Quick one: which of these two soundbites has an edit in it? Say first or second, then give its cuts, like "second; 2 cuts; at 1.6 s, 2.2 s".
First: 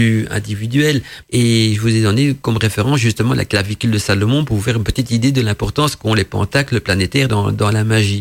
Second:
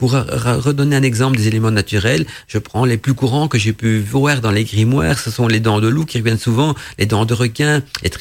first; 2 cuts; at 1.2 s, 7.3 s